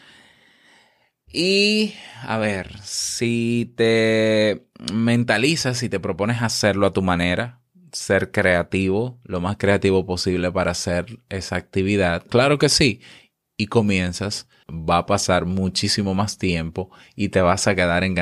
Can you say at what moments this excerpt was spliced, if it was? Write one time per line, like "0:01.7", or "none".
0:12.3
0:14.6